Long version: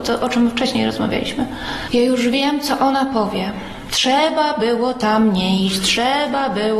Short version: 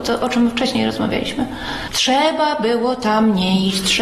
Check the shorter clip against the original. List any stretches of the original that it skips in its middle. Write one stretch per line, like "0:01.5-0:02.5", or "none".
0:01.9-0:03.9